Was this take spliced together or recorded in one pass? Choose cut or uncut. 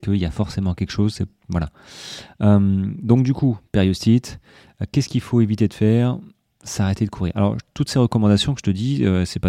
uncut